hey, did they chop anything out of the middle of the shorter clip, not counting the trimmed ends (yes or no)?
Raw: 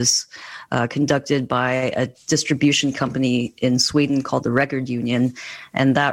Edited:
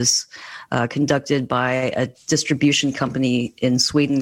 no